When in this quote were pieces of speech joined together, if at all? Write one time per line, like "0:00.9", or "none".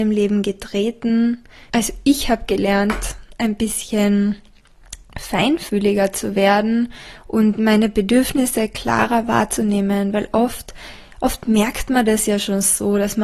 0:01.7